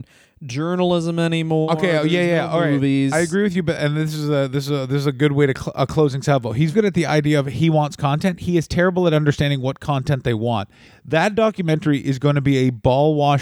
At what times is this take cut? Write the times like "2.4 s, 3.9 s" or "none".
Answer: 6.7 s